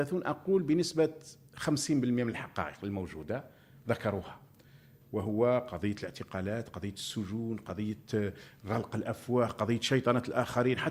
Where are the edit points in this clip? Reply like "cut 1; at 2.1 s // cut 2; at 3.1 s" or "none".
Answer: none